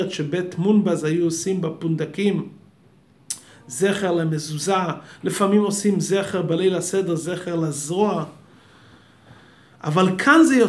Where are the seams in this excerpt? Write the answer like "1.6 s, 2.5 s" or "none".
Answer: none